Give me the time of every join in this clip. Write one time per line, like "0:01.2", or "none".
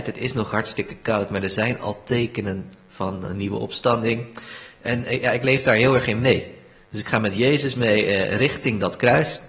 none